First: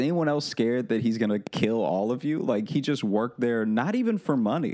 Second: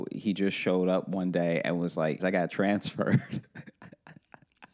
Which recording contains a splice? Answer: second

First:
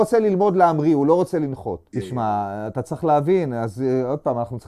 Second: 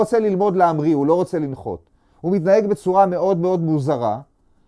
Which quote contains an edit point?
first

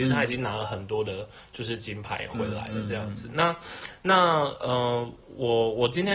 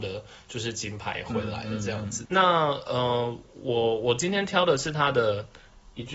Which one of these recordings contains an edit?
second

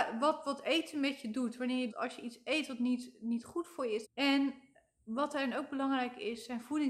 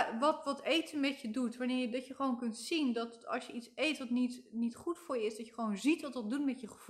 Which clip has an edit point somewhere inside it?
first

